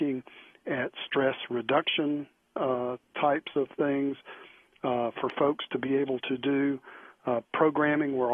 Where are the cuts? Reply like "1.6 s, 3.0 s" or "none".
none